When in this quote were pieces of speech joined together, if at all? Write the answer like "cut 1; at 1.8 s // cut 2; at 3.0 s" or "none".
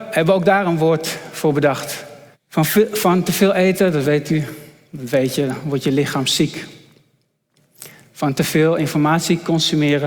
cut 1; at 2.3 s

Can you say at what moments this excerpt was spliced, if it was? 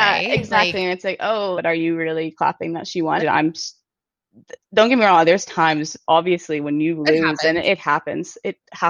cut 1; at 1.5 s // cut 2; at 3.2 s // cut 3; at 6.1 s

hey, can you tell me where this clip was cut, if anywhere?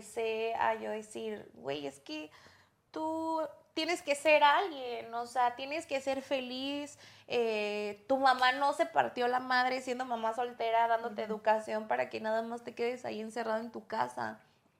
none

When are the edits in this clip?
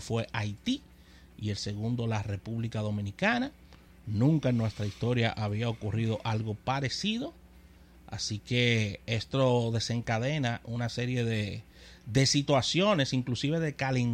none

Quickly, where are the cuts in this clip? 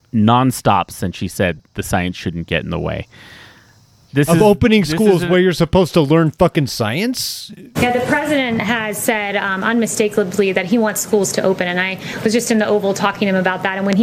cut 1; at 4.1 s // cut 2; at 7.8 s

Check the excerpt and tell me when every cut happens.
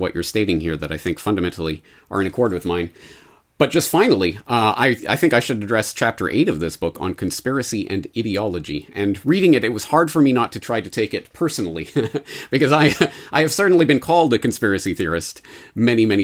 none

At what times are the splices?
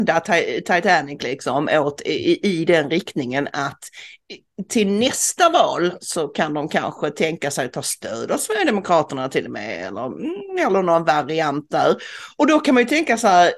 none

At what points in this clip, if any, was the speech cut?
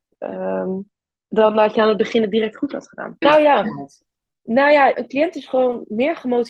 cut 1; at 3.2 s // cut 2; at 4.9 s

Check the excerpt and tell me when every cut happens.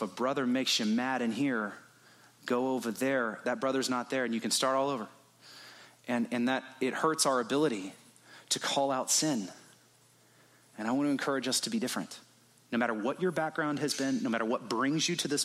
none

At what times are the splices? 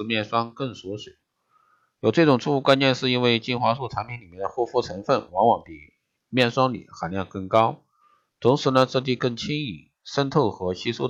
none

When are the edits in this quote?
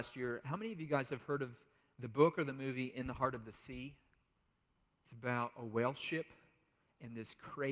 none

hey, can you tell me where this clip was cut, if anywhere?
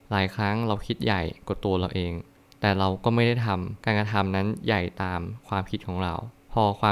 none

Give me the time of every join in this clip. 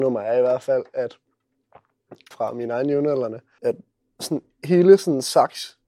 cut 1; at 2.3 s // cut 2; at 3.6 s

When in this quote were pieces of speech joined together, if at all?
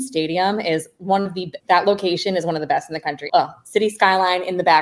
cut 1; at 1.6 s // cut 2; at 3.3 s

